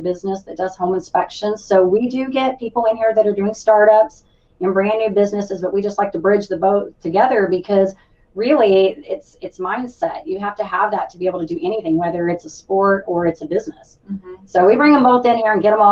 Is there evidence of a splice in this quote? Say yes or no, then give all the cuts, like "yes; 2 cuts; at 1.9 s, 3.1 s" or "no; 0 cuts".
no; 0 cuts